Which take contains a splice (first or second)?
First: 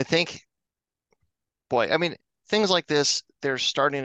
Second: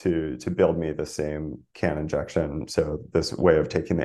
second